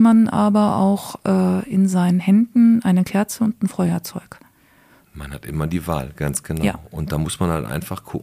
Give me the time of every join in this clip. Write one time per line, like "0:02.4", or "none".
0:05.0